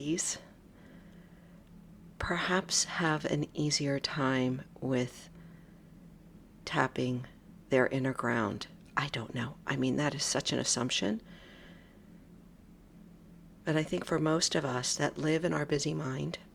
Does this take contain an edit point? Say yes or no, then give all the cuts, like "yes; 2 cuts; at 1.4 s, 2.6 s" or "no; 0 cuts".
no; 0 cuts